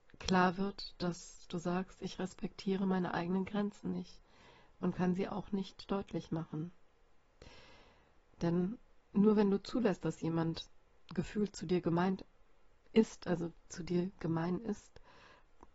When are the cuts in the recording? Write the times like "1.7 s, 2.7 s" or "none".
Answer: none